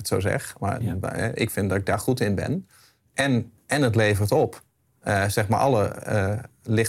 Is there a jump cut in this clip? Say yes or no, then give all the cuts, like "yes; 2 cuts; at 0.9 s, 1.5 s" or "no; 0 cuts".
no; 0 cuts